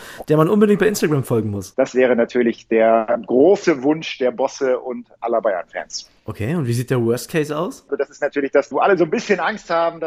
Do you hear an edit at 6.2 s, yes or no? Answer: no